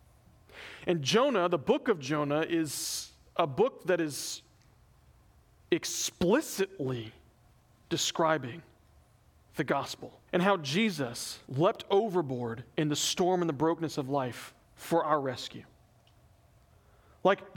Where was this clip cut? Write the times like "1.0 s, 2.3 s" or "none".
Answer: 10.3 s, 11.5 s, 14.6 s